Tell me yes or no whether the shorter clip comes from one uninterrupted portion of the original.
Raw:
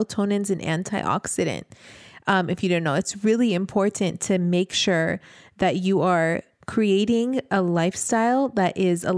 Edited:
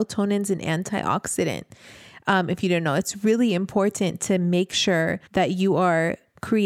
no